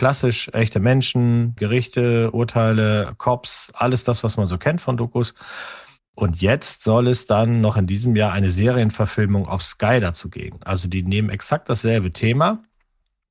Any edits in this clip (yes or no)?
yes